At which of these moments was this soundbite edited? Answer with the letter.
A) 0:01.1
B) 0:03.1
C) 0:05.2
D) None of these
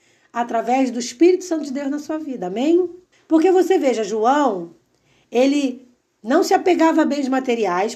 B